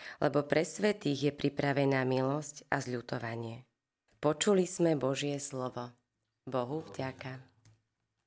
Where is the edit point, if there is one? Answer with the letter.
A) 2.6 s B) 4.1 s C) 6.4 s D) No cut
B